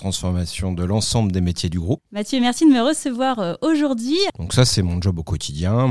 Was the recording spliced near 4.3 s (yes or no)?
yes